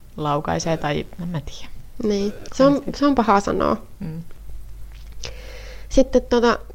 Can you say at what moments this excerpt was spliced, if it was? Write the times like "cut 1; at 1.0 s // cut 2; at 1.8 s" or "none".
none